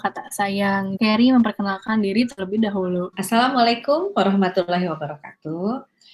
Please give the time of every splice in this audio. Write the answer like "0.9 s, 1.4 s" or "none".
1.0 s, 3.1 s